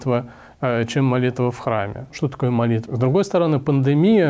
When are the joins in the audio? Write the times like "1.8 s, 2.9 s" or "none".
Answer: 2.9 s